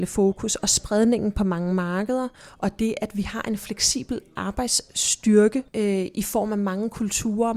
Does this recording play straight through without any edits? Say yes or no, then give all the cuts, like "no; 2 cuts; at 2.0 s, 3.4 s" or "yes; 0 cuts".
no; 1 cut; at 5.7 s